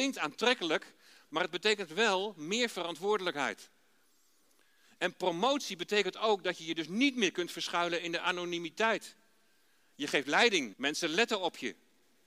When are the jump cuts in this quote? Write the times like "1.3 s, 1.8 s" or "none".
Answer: 10.7 s

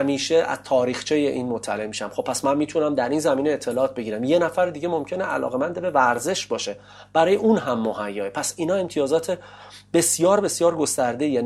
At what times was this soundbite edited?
none

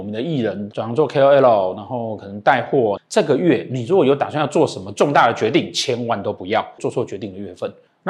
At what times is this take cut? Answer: 3.0 s, 6.8 s

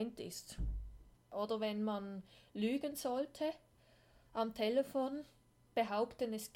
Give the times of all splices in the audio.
1.2 s

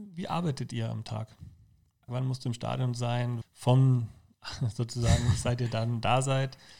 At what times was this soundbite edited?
2.1 s, 3.4 s

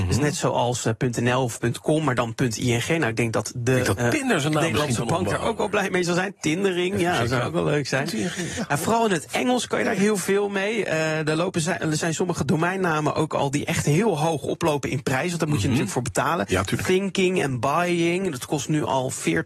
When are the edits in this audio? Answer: none

